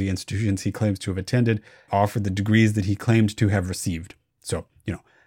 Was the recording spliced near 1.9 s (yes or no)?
yes